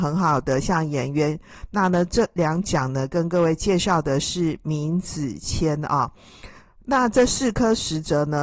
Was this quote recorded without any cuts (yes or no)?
yes